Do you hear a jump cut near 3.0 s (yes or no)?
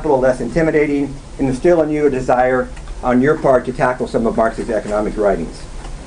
yes